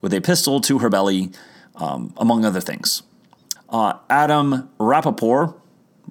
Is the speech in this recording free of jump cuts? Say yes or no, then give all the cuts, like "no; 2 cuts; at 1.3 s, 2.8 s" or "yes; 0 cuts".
no; 1 cut; at 3.6 s